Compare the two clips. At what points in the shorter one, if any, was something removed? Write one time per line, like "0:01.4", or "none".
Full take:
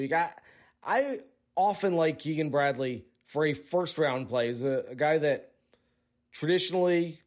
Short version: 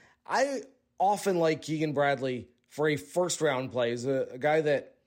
none